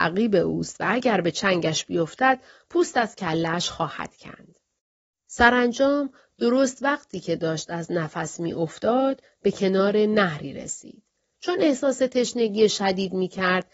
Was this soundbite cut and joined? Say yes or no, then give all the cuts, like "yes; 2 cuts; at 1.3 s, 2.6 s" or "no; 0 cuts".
no; 0 cuts